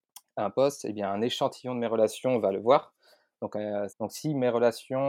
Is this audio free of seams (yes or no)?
no